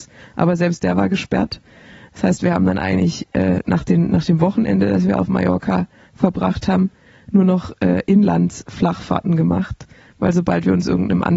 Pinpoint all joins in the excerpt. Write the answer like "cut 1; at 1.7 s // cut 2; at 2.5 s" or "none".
none